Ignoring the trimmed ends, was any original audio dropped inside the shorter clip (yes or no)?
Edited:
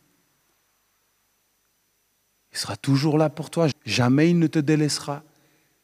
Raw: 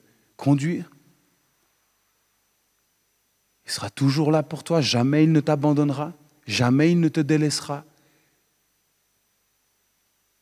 yes